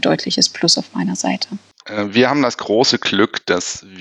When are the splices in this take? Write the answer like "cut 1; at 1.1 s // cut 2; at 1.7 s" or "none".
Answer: cut 1; at 1.8 s